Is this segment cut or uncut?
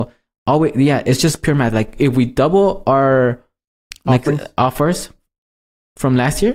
uncut